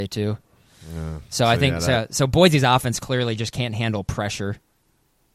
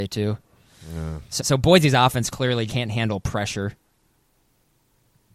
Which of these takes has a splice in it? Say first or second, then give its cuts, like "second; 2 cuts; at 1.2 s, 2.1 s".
second; 2 cuts; at 1.4 s, 2.7 s